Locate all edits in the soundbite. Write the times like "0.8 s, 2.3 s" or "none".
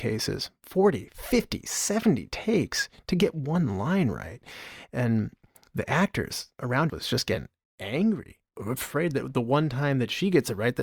6.9 s